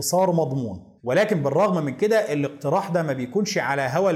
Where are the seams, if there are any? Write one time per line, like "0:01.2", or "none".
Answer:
0:01.0